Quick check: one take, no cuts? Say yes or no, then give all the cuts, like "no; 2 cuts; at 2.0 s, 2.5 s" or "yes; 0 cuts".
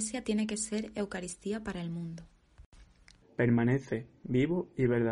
no; 1 cut; at 3.2 s